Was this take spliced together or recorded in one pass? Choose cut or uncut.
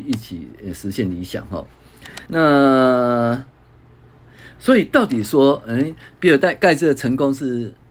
cut